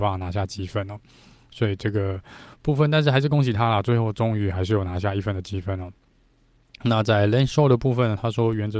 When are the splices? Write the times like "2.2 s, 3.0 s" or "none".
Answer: none